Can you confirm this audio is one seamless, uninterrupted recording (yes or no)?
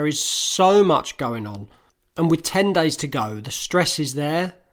yes